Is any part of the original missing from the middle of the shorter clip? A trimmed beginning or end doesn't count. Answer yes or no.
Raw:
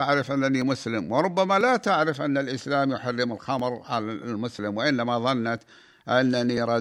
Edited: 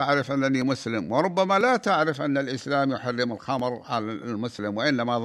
no